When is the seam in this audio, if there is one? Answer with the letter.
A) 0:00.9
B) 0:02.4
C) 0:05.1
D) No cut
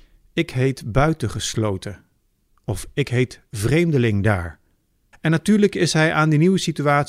C